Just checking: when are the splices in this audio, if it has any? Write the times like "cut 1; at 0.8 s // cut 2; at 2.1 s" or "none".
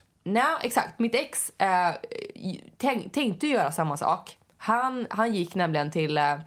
none